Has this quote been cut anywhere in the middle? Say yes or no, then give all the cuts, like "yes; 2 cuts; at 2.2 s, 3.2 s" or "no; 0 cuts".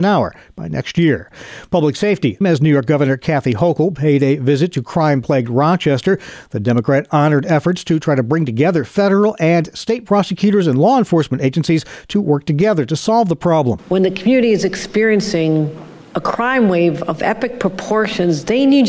yes; 2 cuts; at 2.4 s, 13.8 s